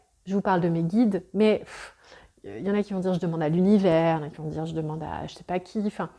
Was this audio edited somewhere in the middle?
no; 0 cuts

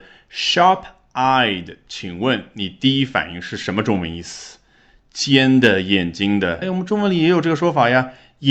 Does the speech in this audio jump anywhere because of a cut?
yes; 1 cut; at 6.6 s

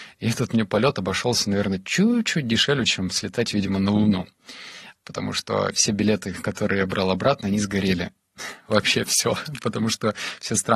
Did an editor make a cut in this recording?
no; 0 cuts

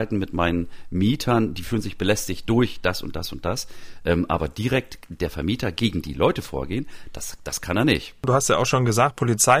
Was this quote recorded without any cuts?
yes; 0 cuts

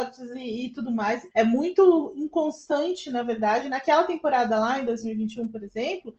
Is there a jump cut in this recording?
yes; 1 cut; at 1.3 s

